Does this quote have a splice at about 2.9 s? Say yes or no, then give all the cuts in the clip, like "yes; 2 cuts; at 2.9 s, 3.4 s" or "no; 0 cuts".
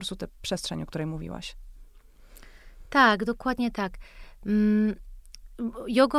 no; 0 cuts